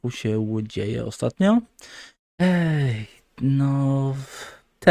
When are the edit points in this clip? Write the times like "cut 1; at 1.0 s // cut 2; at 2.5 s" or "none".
cut 1; at 2.2 s